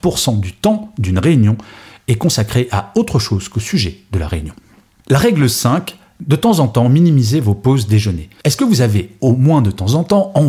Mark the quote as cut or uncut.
cut